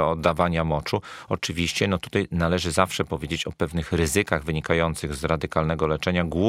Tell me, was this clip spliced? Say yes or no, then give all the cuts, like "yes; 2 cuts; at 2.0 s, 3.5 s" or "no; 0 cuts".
no; 0 cuts